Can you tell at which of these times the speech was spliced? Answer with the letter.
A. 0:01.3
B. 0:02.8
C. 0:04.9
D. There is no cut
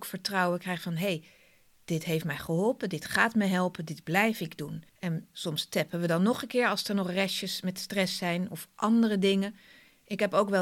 C